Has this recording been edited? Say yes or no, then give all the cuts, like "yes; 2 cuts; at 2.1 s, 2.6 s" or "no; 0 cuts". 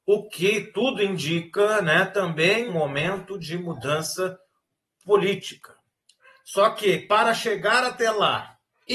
yes; 1 cut; at 2.7 s